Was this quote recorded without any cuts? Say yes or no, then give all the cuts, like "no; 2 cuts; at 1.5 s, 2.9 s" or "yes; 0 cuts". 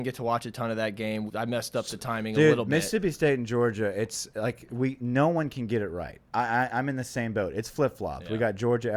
no; 1 cut; at 1.3 s